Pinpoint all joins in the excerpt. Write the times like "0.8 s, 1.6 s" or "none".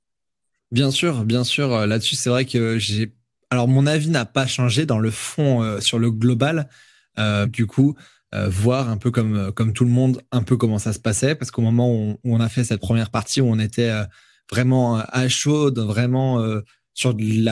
7.4 s

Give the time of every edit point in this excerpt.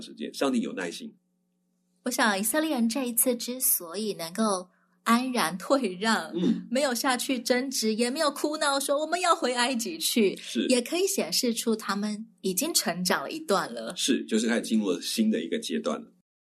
none

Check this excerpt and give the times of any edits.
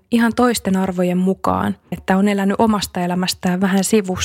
1.9 s

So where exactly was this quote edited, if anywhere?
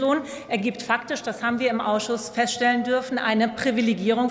none

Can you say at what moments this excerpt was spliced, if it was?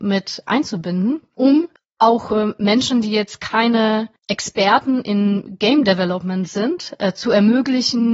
none

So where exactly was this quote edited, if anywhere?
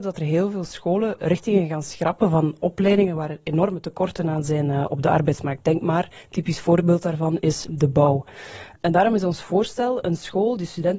none

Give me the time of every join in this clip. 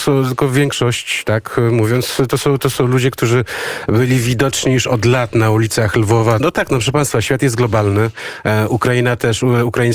6.4 s

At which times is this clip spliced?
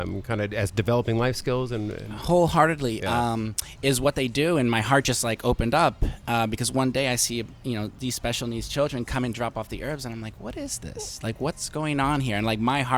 none

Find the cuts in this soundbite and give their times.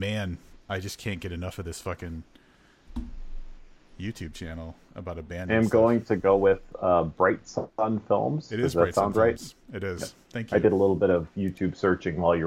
none

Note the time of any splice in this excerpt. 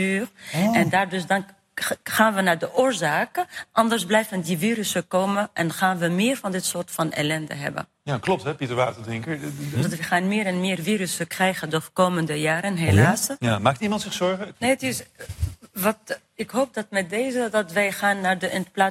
9.7 s, 13.4 s, 14.5 s

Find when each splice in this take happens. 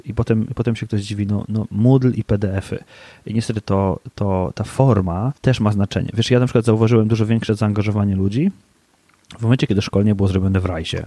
5.4 s

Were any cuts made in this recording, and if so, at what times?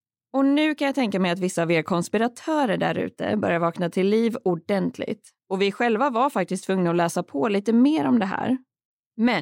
5.4 s

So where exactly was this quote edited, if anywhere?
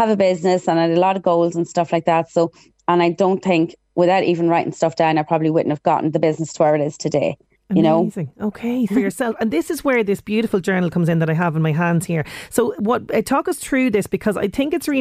8.9 s

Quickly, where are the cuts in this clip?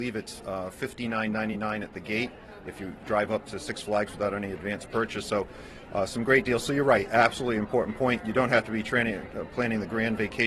none

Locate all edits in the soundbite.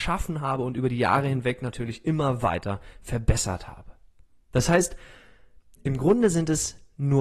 none

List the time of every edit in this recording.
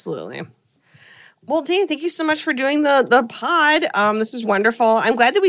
4.4 s

